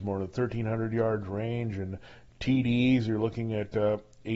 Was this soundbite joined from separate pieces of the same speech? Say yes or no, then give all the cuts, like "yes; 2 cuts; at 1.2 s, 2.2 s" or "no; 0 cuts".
no; 0 cuts